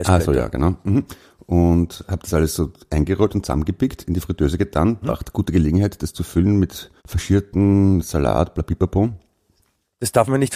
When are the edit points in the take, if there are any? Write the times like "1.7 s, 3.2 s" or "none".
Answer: 5.0 s, 7.0 s